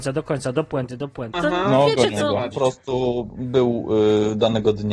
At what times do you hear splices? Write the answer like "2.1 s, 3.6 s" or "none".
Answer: 1.3 s, 2.5 s